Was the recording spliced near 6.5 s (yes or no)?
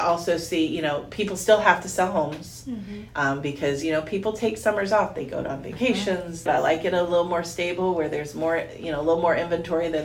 yes